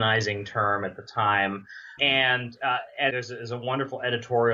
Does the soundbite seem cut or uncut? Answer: cut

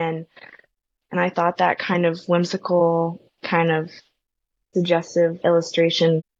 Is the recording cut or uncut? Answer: cut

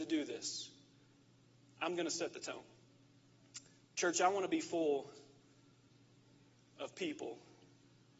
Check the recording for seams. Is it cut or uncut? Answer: uncut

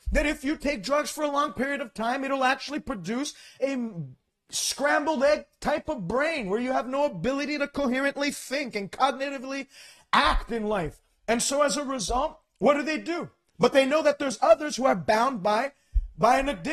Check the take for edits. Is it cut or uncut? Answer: cut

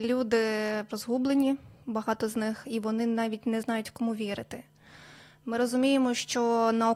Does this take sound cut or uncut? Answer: cut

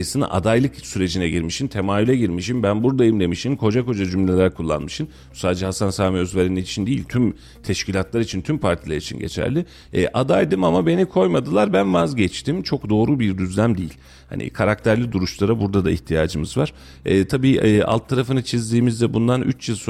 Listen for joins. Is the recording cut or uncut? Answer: uncut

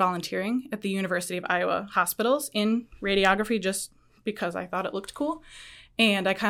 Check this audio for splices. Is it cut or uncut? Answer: uncut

